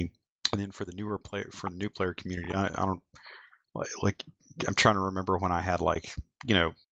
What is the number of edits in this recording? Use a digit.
0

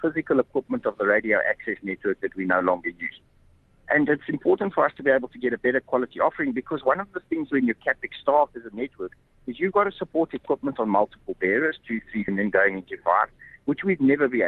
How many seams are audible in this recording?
1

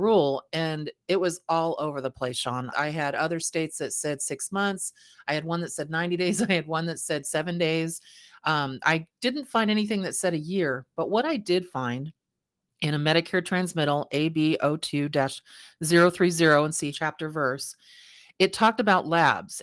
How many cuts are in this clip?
2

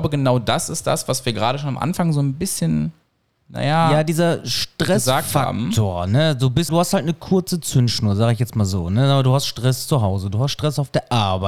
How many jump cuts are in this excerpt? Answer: 1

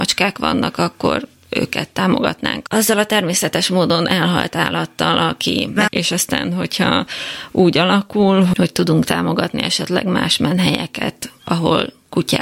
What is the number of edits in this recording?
1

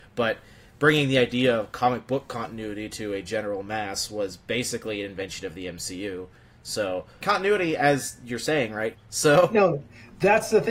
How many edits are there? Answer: 2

